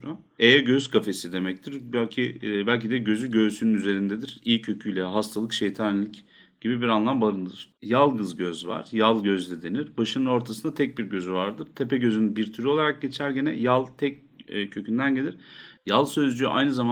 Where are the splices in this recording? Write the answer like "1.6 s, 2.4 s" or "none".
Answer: none